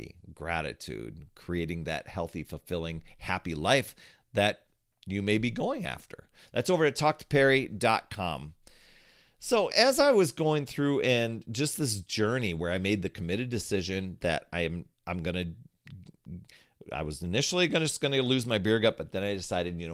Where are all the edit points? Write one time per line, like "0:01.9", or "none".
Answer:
0:09.7
0:14.9